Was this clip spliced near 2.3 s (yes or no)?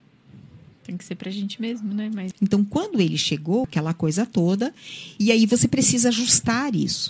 yes